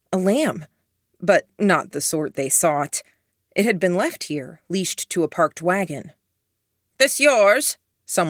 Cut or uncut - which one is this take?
uncut